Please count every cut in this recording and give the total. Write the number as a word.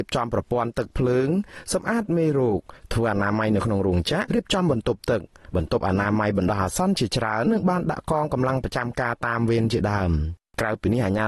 two